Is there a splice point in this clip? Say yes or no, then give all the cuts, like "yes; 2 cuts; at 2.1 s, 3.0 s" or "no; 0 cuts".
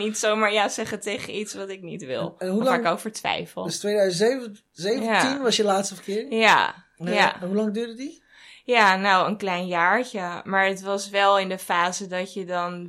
no; 0 cuts